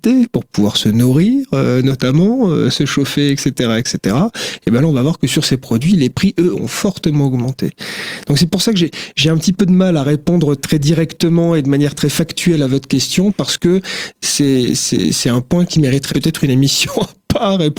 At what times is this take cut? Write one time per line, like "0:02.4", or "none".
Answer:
0:02.7
0:10.6
0:16.1

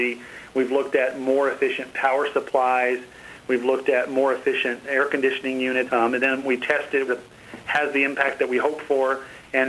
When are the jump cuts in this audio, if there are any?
0:05.9
0:07.1

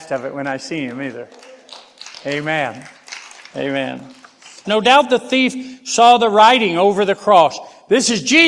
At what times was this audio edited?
0:04.6

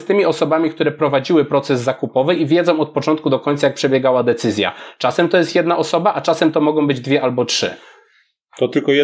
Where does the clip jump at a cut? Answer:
none

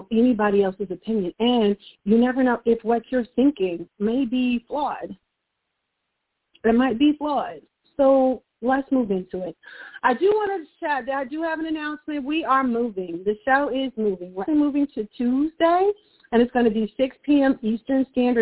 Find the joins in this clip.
0:14.5

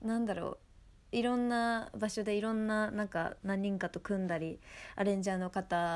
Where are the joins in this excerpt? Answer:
none

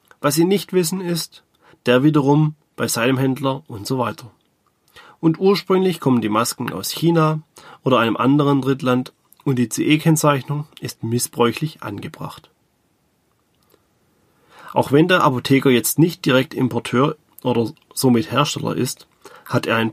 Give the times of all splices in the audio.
0:01.7

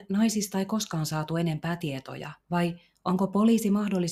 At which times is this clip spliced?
0:02.4

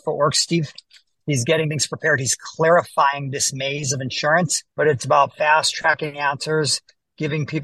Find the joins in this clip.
0:04.7

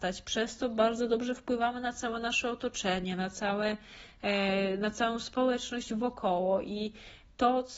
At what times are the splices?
none

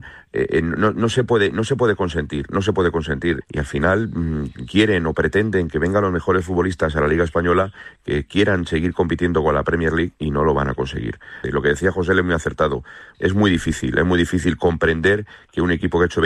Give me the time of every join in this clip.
0:03.4
0:11.4
0:13.1

